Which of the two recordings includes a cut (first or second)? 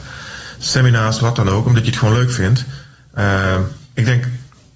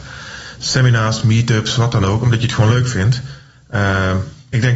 first